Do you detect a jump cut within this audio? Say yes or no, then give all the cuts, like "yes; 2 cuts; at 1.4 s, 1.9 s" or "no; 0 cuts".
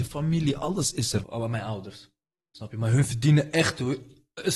yes; 1 cut; at 1.2 s